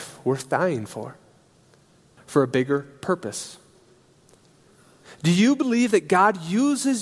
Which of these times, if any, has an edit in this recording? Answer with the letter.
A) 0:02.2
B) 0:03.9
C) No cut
A